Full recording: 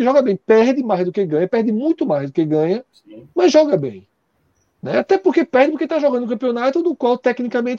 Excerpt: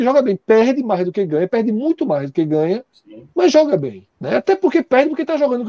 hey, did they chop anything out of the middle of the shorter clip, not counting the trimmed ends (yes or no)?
yes